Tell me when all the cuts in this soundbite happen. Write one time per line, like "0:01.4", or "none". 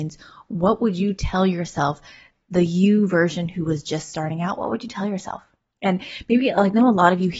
none